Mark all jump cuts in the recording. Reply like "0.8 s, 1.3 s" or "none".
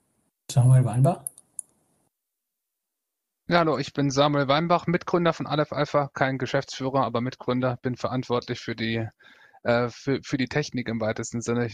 none